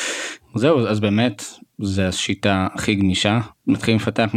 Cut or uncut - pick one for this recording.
uncut